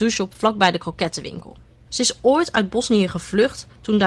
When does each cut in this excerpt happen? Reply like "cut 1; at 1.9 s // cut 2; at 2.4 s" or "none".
cut 1; at 1.9 s

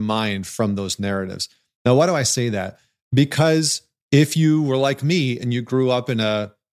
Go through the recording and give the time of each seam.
none

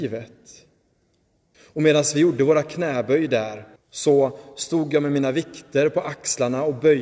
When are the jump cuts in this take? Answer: cut 1; at 1.5 s // cut 2; at 3.8 s

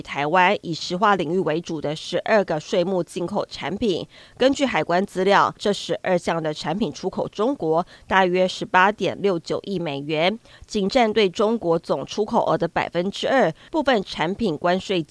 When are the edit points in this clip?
cut 1; at 5.6 s // cut 2; at 13.7 s

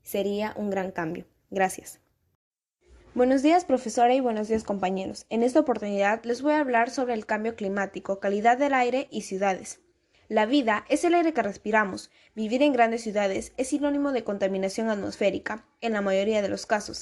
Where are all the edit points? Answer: none

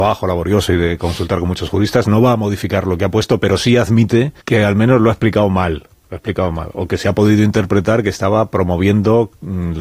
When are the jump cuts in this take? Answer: cut 1; at 4.4 s

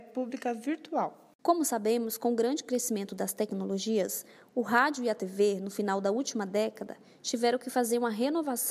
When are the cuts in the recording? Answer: none

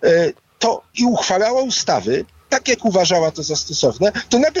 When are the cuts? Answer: cut 1; at 0.9 s

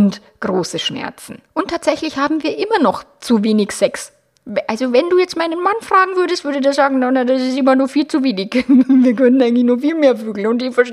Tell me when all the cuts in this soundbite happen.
cut 1; at 1.5 s

